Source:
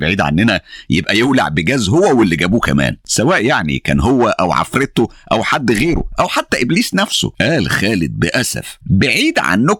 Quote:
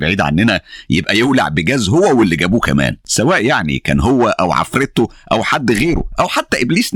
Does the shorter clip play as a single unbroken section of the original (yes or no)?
yes